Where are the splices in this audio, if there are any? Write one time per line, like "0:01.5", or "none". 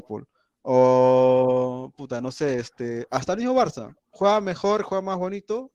none